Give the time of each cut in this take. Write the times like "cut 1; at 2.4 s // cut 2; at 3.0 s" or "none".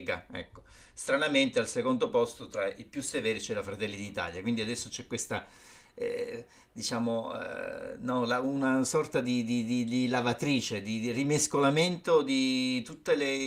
none